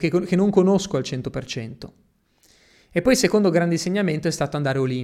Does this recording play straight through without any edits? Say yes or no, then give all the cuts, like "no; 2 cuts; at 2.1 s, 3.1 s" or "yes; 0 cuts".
yes; 0 cuts